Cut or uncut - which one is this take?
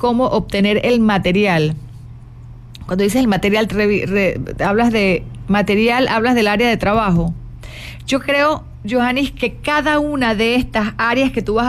cut